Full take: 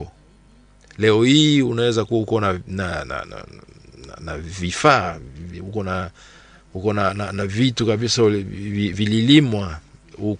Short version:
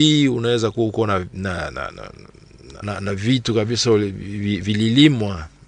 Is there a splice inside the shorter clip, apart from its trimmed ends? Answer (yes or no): yes